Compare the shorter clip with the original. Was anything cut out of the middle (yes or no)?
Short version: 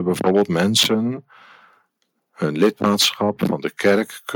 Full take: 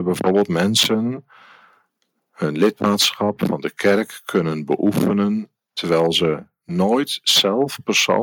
no